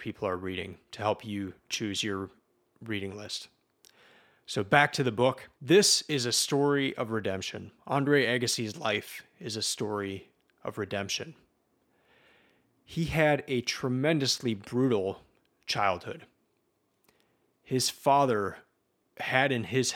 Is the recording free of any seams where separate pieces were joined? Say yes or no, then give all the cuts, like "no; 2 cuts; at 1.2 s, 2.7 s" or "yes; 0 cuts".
no; 1 cut; at 5.5 s